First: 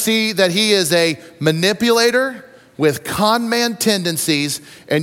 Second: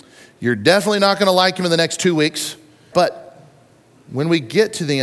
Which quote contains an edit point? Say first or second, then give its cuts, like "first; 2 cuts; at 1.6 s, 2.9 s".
second; 1 cut; at 2.9 s